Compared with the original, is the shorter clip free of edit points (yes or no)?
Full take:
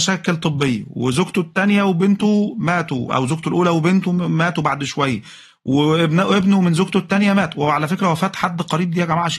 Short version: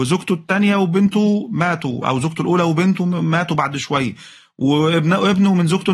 yes